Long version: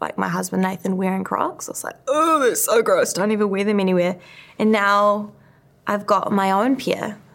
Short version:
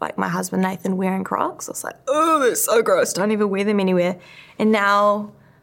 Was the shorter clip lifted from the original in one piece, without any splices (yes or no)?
yes